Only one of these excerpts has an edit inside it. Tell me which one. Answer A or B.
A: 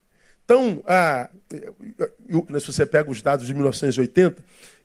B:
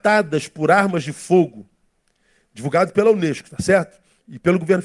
A